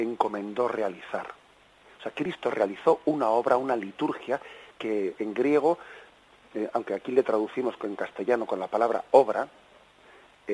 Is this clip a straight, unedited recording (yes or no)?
no